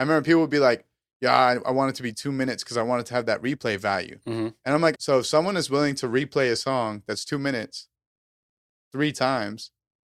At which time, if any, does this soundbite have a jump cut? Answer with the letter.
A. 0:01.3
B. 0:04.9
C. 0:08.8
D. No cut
B